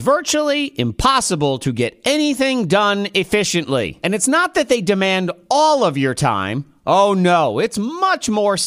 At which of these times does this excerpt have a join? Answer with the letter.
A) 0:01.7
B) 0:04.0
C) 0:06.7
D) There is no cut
D